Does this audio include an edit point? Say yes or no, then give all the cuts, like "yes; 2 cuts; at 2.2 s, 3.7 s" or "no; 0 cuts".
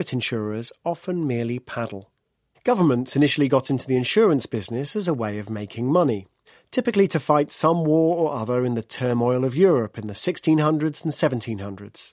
yes; 1 cut; at 2.5 s